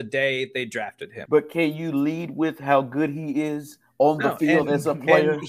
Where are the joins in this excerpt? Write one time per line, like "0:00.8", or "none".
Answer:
0:01.3